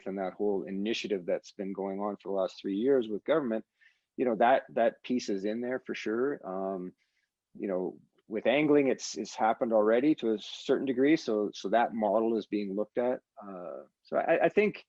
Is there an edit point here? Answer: no; 0 cuts

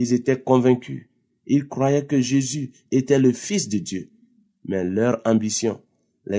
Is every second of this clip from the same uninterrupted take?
yes; 0 cuts

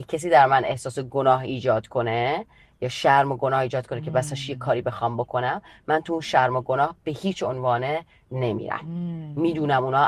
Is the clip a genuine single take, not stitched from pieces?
yes; 0 cuts

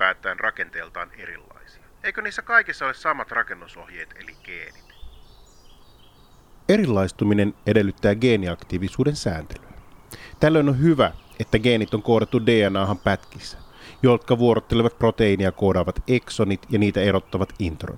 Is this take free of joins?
yes; 0 cuts

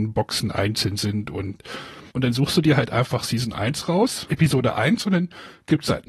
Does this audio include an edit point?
yes; 2 cuts; at 2.1 s, 4.3 s

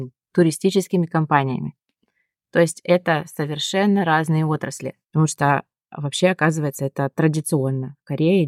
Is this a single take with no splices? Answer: no; 1 cut; at 5.0 s

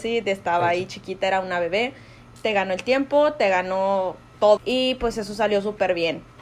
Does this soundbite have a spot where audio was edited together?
yes; 2 cuts; at 2.3 s, 4.6 s

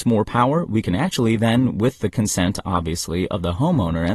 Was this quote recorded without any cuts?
yes; 0 cuts

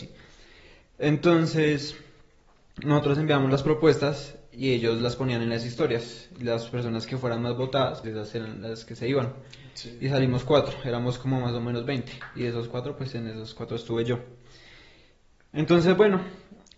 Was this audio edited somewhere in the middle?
yes; 1 cut; at 8.0 s

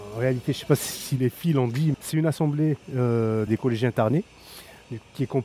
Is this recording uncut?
no; 2 cuts; at 1.9 s, 3.5 s

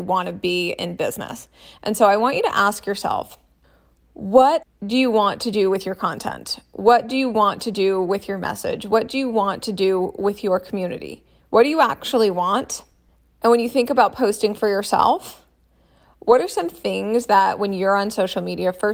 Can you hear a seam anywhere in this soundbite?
no; 0 cuts

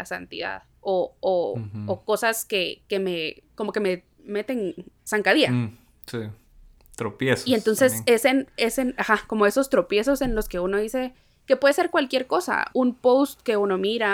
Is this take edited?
yes; 1 cut; at 12.7 s

